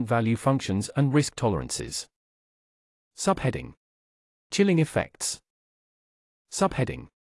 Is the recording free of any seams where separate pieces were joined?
yes; 0 cuts

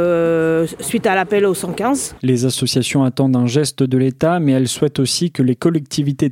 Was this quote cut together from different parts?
yes; 1 cut; at 2.2 s

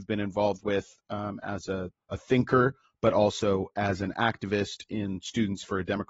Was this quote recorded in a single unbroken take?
yes; 0 cuts

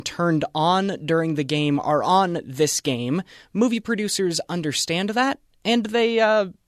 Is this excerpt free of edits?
yes; 0 cuts

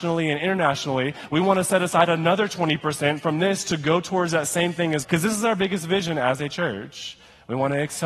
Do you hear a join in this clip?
yes; 1 cut; at 5.0 s

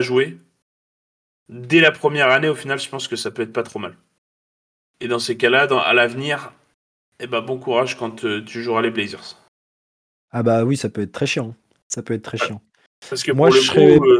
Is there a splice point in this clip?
no; 0 cuts

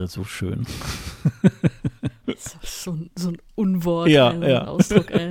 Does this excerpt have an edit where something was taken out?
no; 0 cuts

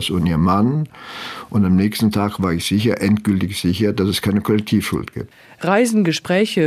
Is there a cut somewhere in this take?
no; 0 cuts

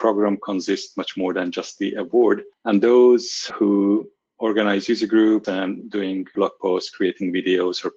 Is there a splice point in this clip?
yes; 2 cuts; at 2.5 s, 5.4 s

